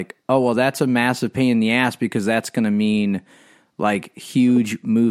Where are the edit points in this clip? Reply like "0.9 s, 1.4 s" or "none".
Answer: none